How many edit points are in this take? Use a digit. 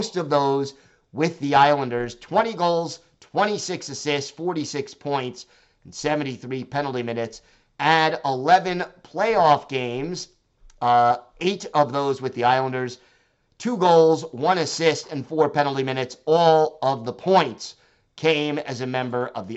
0